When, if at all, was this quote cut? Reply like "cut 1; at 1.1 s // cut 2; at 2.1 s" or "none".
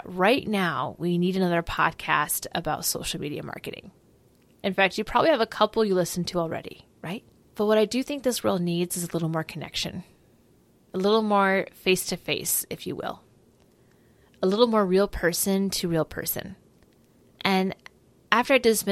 none

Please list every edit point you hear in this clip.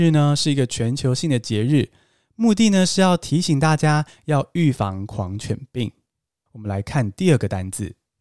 cut 1; at 6.5 s

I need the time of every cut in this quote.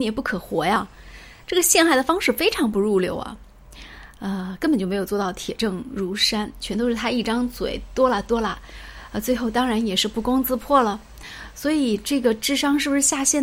none

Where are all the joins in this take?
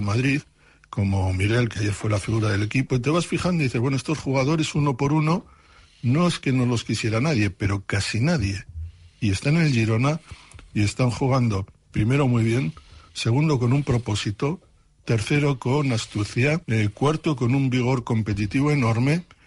cut 1; at 16.6 s

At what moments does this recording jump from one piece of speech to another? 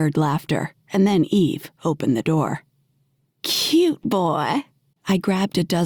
cut 1; at 4.9 s

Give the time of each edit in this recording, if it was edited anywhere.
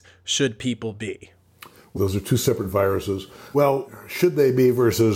cut 1; at 2.0 s // cut 2; at 3.5 s

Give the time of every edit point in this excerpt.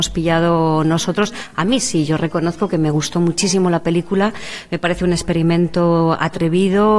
none

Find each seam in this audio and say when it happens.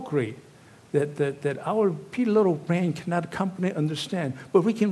none

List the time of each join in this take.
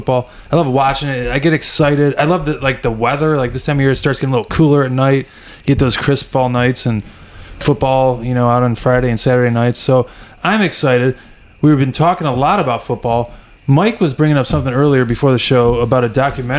none

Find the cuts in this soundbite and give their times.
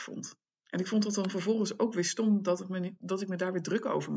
cut 1; at 3.0 s

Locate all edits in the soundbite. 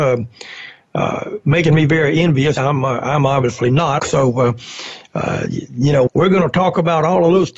cut 1; at 2.6 s // cut 2; at 4.0 s // cut 3; at 6.1 s

